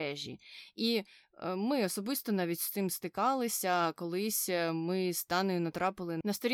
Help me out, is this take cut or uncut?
uncut